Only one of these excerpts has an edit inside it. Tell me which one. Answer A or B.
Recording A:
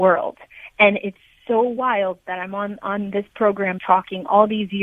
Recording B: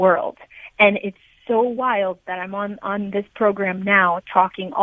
A